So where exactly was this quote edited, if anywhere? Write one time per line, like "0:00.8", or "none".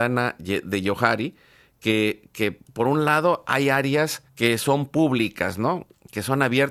0:04.3